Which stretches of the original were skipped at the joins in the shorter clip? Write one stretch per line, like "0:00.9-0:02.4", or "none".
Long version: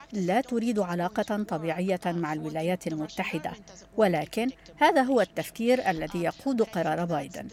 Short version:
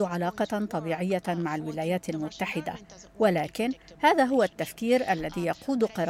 none

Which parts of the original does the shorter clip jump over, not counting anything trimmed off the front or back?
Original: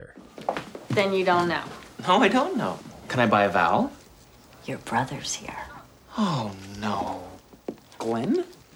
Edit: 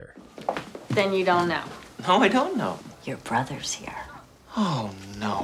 0:02.9-0:04.6

